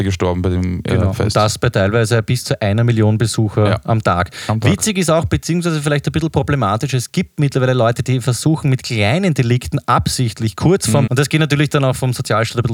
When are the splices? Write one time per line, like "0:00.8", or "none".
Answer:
0:11.1